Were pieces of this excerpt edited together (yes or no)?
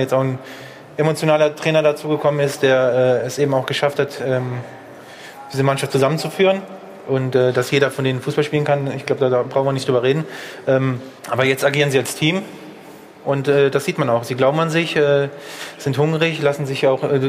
yes